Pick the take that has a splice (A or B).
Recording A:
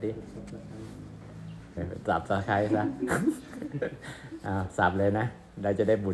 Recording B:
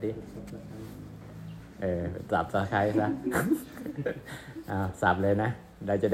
A